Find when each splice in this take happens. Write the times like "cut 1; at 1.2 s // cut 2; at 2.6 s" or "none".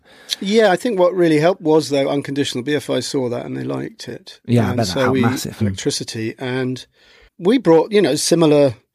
cut 1; at 5.6 s // cut 2; at 7.3 s